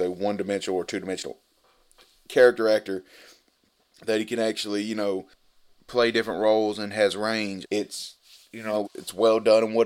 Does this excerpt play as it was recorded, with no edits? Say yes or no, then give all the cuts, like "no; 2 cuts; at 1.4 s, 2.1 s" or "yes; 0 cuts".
no; 2 cuts; at 7.6 s, 8.8 s